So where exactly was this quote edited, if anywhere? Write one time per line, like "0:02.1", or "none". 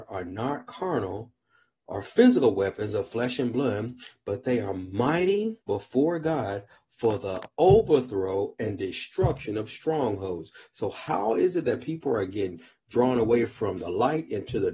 0:05.6